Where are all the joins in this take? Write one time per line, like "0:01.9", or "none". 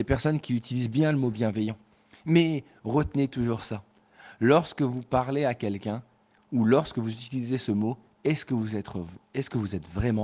none